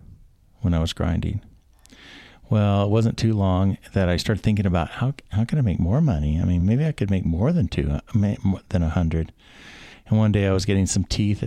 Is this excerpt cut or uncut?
uncut